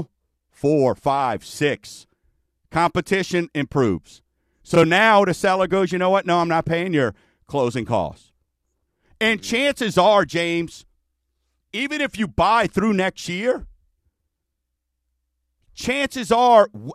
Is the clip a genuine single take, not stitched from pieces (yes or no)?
yes